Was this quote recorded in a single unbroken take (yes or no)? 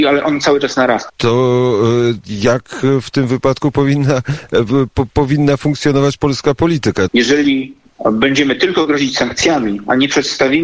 no